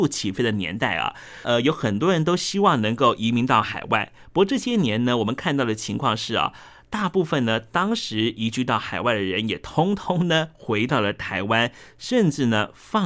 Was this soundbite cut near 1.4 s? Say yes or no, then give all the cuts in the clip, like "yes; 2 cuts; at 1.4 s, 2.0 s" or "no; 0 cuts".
yes; 1 cut; at 1.4 s